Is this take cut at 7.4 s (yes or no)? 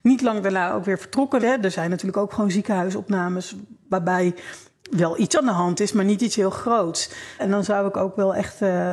yes